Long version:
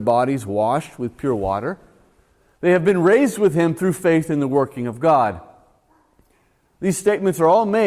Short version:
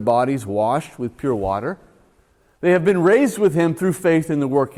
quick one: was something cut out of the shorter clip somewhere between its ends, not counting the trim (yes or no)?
no